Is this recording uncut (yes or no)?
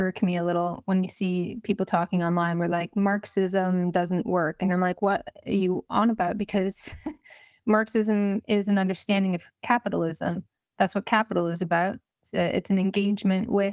yes